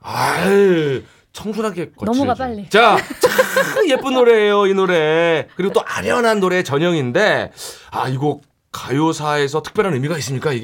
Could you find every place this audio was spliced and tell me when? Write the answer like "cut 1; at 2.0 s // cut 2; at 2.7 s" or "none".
none